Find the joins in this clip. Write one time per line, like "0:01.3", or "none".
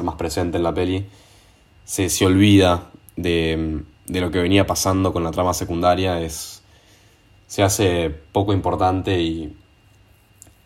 none